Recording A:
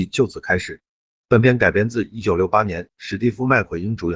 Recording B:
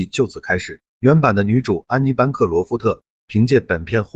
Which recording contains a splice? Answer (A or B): B